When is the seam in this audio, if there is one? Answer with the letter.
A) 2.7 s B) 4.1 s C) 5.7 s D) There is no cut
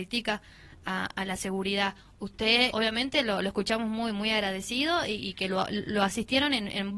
A